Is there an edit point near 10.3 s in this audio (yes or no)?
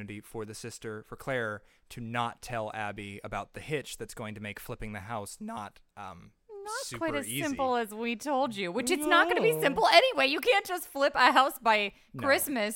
no